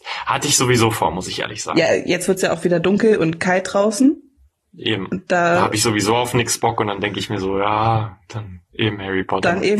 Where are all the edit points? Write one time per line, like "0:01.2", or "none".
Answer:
none